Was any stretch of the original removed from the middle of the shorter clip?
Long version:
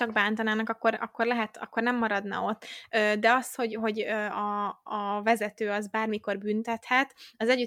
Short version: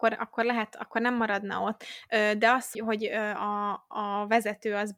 yes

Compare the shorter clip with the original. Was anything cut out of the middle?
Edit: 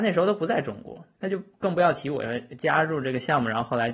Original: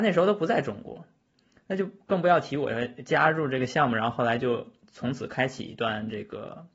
yes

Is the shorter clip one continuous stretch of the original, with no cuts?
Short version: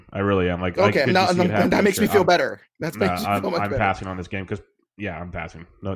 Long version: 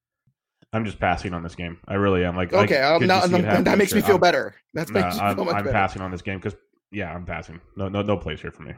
no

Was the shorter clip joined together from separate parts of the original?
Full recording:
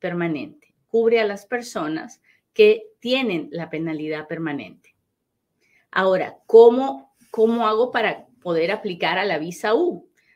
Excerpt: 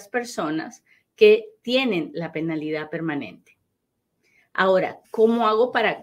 yes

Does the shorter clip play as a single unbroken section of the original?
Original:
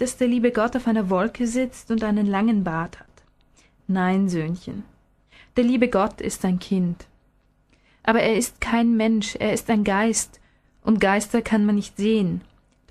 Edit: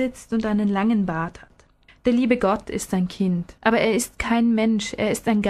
no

